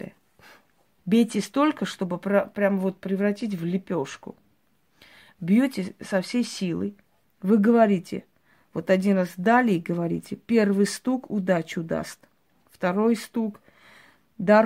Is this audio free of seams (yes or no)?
no